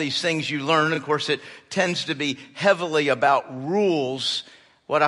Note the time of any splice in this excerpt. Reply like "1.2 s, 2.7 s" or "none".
none